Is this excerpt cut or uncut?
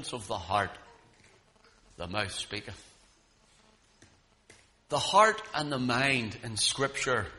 uncut